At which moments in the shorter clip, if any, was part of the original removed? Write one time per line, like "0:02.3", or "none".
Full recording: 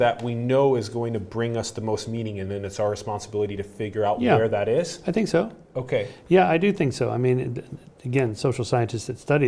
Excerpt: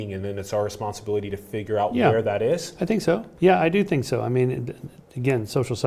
0:03.3